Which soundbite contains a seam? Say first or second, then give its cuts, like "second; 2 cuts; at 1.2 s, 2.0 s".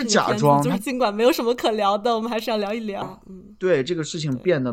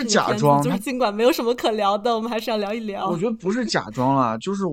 first; 1 cut; at 3.0 s